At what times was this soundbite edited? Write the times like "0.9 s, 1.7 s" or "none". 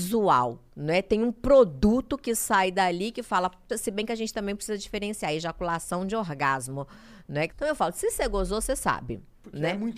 3.7 s, 7.5 s